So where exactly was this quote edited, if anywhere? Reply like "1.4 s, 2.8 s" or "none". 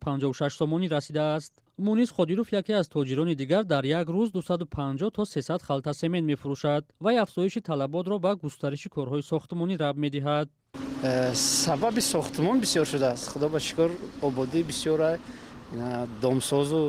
6.9 s